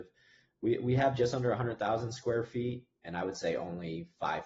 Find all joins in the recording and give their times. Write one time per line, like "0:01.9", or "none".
none

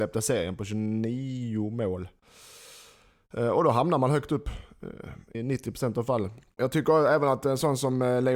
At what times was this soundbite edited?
0:05.3
0:06.6

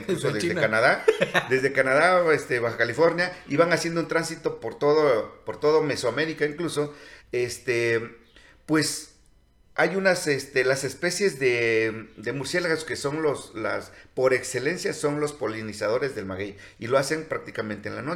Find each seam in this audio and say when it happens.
0:01.5
0:07.2

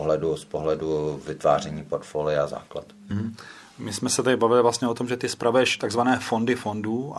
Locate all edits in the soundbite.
none

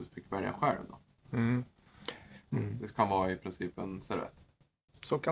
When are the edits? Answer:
0:02.4

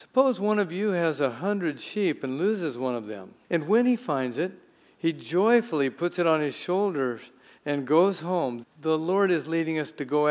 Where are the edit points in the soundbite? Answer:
0:03.4
0:08.6

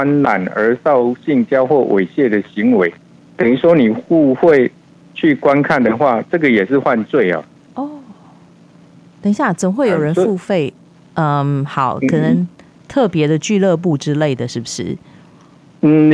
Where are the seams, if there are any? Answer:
none

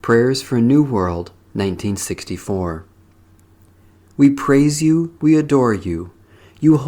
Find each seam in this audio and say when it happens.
0:05.2

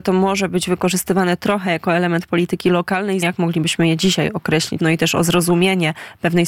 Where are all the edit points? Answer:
0:03.2
0:04.8

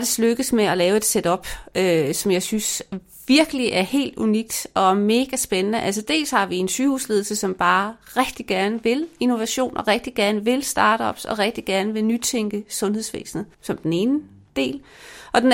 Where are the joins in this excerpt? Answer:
0:13.5

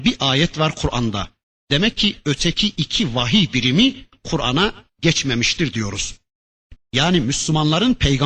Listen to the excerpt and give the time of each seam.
0:06.7

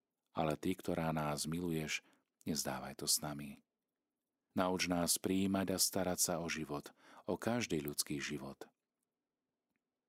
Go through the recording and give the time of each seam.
0:04.5

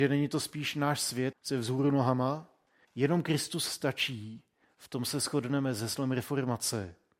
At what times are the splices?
0:01.3
0:02.8

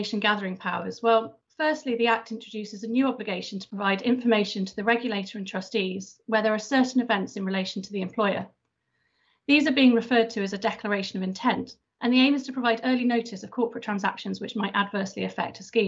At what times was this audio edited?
none

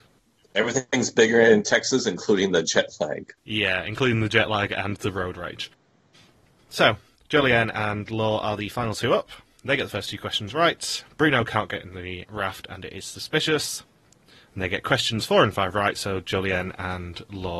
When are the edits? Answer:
none

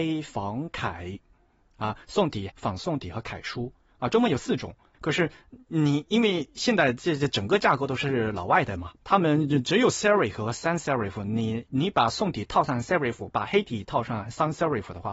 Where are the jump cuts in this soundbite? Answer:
0:02.5
0:09.0

